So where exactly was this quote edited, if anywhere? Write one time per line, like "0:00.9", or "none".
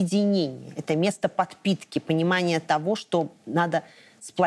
none